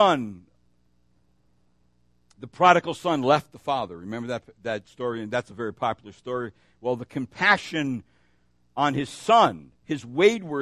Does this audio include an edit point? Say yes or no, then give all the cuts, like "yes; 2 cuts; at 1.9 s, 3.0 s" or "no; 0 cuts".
no; 0 cuts